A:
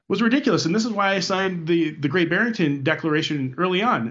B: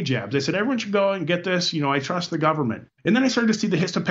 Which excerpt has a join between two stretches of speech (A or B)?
B